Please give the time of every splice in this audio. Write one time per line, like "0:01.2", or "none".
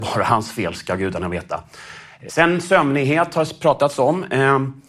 0:02.3

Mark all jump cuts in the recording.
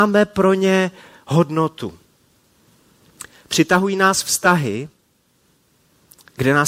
none

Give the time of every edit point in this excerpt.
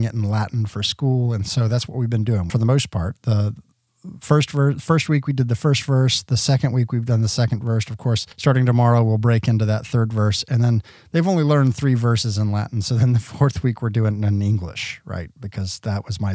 0:02.5
0:08.3

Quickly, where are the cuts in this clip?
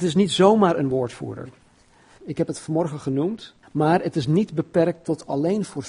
0:02.2
0:03.6

